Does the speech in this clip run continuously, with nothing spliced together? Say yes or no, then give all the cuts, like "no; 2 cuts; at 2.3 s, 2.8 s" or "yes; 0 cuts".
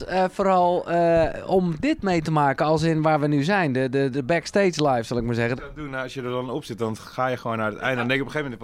no; 2 cuts; at 4.1 s, 5.6 s